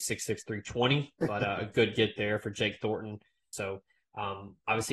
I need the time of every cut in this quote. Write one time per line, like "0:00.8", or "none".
0:03.5